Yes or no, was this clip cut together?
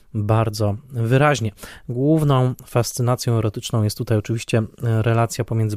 no